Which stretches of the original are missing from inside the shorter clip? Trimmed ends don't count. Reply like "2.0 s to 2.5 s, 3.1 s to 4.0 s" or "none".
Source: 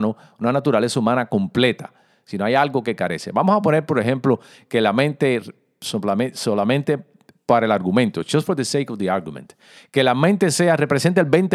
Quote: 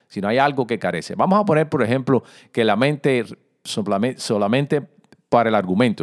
none